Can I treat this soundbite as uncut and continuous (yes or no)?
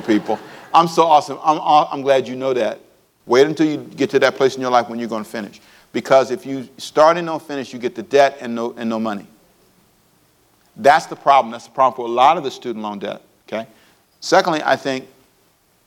no